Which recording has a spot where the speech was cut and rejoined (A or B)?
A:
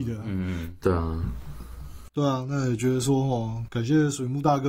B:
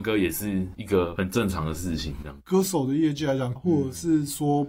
B